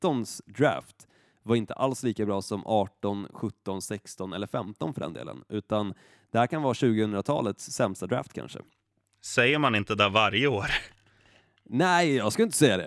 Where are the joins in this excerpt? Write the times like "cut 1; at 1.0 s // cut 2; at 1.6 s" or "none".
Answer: none

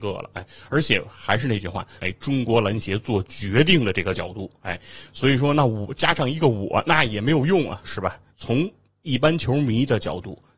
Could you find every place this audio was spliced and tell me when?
cut 1; at 2.0 s // cut 2; at 8.3 s

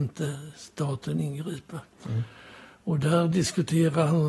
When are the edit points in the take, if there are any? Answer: none

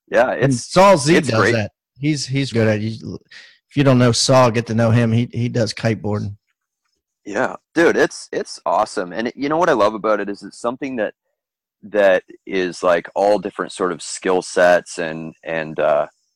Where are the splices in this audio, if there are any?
cut 1; at 2.5 s

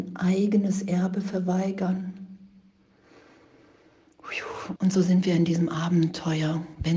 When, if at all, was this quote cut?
cut 1; at 4.8 s

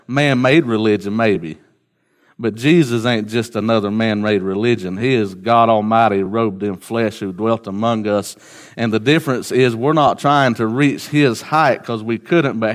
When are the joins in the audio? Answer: none

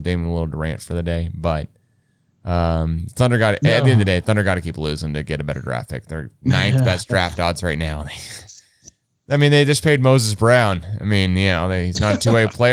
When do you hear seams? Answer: none

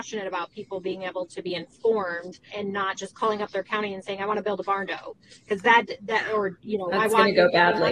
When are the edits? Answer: cut 1; at 2.5 s

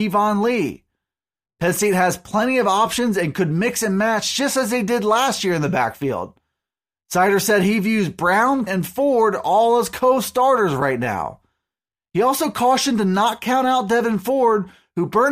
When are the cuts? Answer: cut 1; at 8.7 s

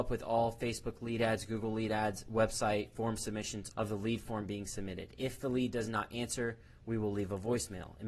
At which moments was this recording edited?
cut 1; at 3.7 s

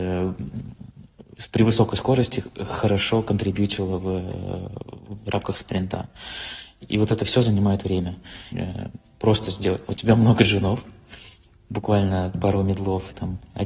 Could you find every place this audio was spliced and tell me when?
cut 1; at 8.5 s // cut 2; at 9.8 s

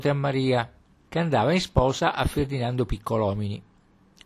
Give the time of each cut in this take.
cut 1; at 1.1 s

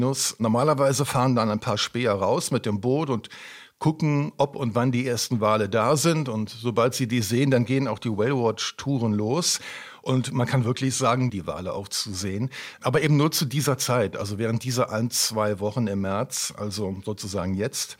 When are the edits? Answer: cut 1; at 11.3 s

